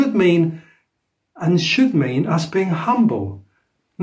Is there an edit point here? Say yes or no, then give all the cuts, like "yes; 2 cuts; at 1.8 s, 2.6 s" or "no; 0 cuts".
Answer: no; 0 cuts